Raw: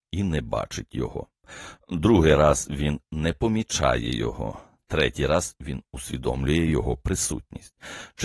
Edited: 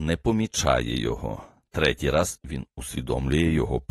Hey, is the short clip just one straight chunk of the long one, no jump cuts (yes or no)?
yes